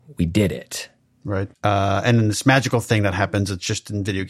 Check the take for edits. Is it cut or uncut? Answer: cut